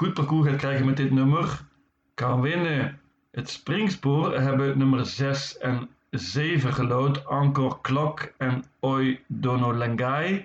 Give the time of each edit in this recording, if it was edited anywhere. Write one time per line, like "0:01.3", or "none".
none